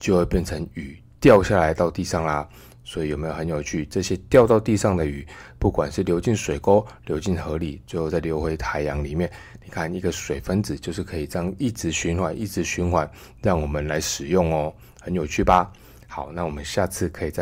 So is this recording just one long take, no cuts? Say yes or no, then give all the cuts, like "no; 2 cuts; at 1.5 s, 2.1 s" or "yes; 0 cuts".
yes; 0 cuts